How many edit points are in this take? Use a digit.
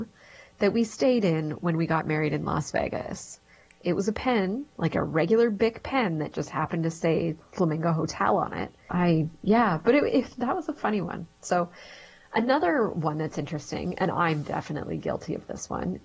1